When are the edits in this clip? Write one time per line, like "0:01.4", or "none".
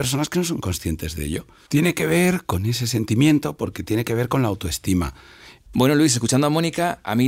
0:01.7
0:05.7